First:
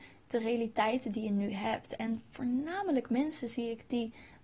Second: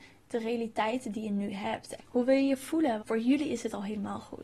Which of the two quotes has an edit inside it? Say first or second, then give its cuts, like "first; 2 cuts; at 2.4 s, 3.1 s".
second; 2 cuts; at 2.0 s, 3.0 s